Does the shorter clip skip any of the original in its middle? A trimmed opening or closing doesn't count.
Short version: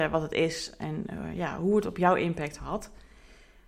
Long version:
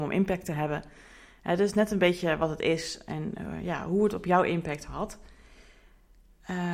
no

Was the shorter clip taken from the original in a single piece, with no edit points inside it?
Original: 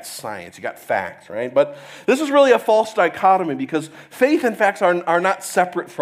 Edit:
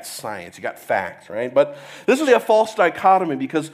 no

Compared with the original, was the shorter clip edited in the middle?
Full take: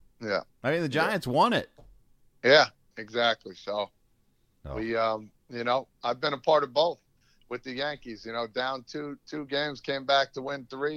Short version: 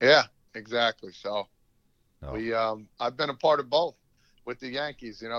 yes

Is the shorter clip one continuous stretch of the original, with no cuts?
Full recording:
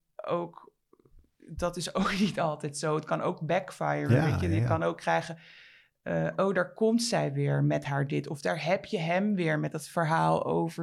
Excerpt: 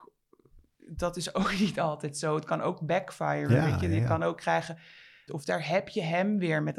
no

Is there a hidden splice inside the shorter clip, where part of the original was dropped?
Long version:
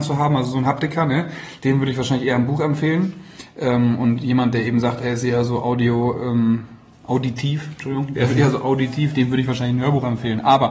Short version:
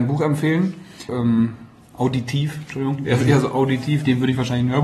yes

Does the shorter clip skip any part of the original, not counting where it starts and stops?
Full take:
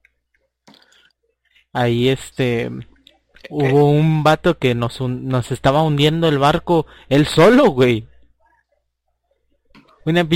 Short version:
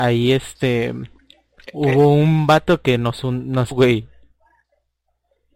yes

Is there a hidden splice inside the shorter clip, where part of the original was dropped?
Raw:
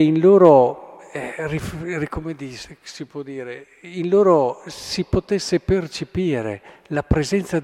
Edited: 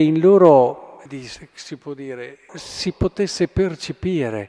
yes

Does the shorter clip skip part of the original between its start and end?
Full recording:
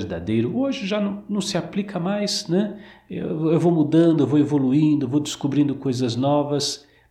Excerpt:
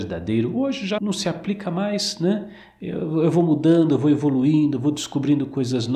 yes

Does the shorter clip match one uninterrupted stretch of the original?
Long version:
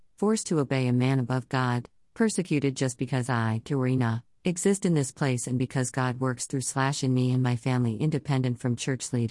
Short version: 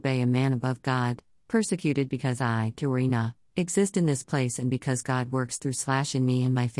no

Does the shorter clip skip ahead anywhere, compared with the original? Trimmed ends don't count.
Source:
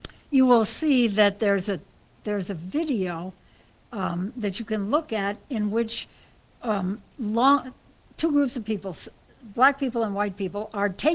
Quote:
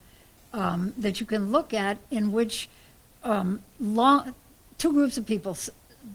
no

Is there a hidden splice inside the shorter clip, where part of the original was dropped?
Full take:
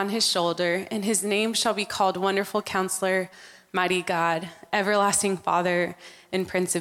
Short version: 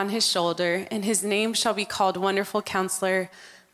no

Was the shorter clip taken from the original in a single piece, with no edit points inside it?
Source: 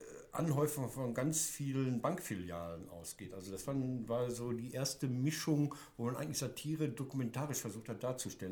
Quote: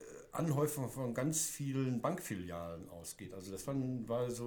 yes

